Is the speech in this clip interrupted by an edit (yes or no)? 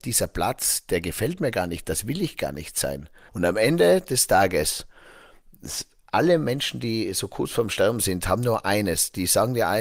yes